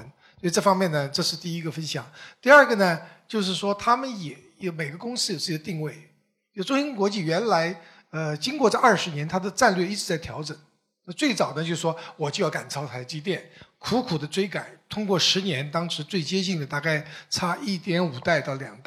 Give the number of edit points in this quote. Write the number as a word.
zero